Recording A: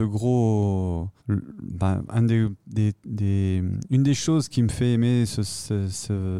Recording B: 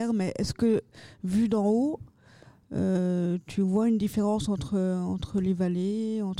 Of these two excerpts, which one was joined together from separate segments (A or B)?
A